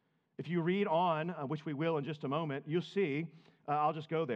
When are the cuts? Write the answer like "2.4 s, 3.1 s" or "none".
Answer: none